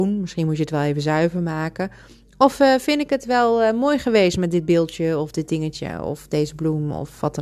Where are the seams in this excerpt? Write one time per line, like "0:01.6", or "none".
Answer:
none

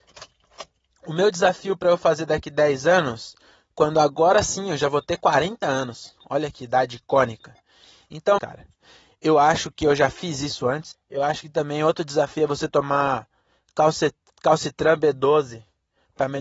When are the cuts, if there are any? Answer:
0:08.4
0:10.9

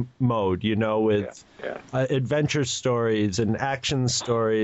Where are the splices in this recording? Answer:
none

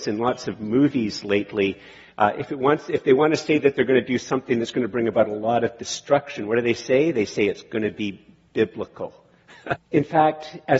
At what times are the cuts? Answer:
0:09.8

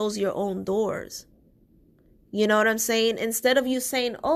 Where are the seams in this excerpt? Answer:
none

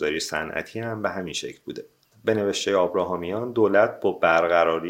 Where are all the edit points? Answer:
none

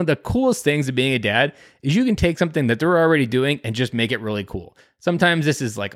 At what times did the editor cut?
none

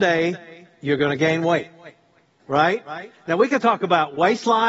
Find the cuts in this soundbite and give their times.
0:02.4

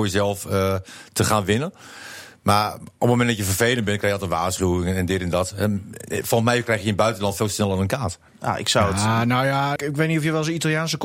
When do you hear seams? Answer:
0:08.3
0:09.8

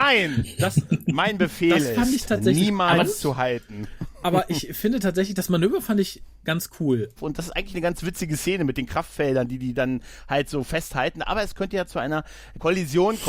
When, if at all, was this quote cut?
0:07.2

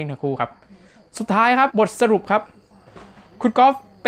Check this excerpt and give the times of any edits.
0:01.7

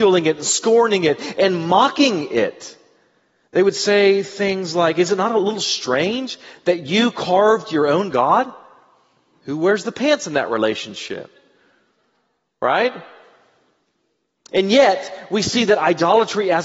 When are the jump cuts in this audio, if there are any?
0:14.5

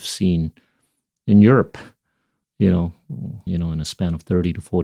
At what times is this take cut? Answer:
0:03.5

